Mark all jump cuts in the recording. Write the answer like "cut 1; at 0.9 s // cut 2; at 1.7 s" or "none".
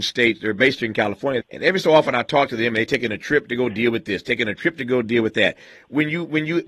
cut 1; at 1.4 s